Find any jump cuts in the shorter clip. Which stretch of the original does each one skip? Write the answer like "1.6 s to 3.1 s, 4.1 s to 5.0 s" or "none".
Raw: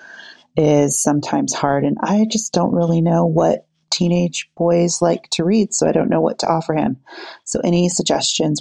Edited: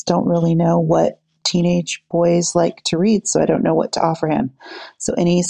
none